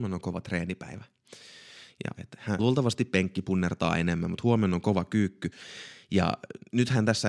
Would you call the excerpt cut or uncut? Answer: cut